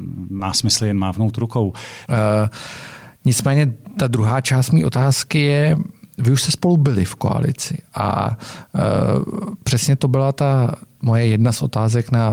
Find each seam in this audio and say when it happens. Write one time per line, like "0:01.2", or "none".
0:02.1